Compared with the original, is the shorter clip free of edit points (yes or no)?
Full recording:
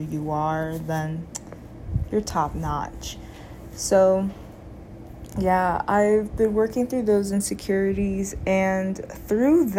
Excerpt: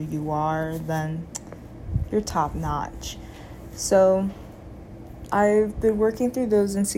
no